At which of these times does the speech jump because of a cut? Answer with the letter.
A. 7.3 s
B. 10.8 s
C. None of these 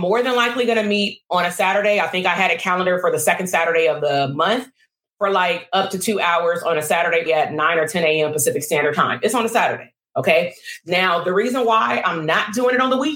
A